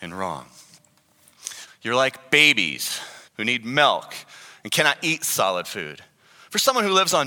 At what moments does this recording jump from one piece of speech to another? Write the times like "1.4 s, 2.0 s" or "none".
1.7 s, 3.3 s